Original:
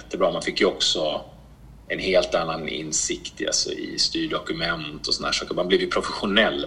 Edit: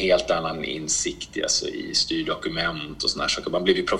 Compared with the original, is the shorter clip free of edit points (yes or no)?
yes